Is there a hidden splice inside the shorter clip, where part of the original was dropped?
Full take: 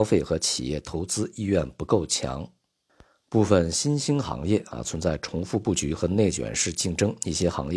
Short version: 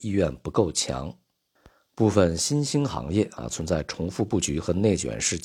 no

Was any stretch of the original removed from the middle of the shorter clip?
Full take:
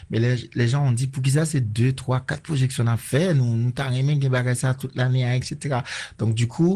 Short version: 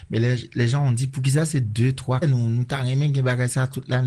yes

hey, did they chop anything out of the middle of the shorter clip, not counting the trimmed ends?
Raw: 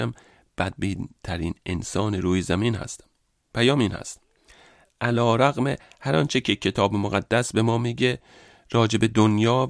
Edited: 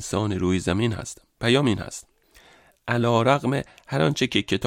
yes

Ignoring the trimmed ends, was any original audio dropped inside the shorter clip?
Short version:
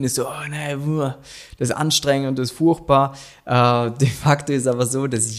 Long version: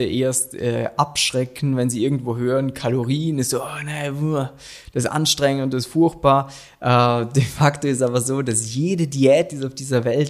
no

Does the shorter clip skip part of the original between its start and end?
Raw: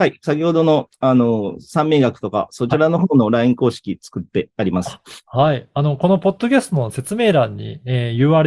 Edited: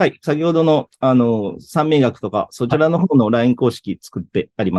no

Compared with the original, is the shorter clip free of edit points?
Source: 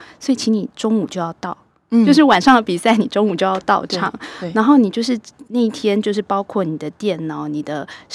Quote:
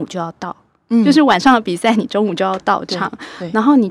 yes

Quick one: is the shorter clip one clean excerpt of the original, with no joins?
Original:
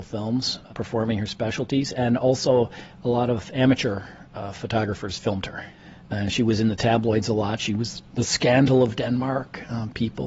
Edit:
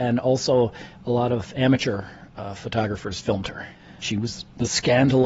no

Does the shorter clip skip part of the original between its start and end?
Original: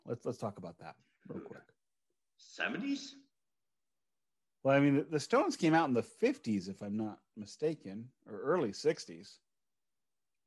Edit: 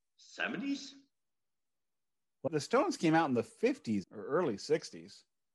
yes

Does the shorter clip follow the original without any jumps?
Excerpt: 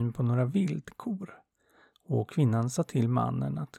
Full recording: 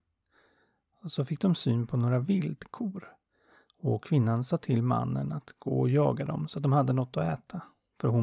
yes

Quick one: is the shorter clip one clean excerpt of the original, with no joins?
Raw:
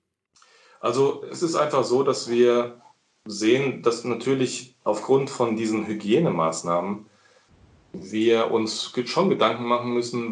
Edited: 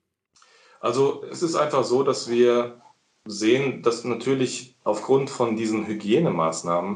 yes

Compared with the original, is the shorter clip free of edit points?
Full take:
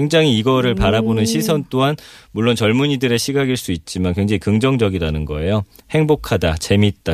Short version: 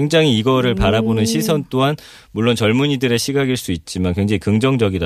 yes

